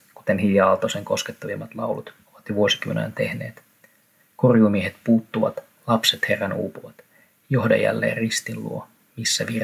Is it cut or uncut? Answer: cut